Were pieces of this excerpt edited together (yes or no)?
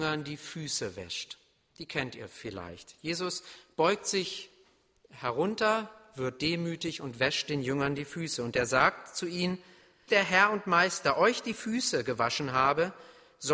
yes